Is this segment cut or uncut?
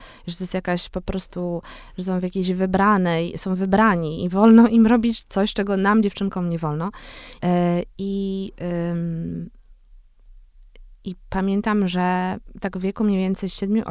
cut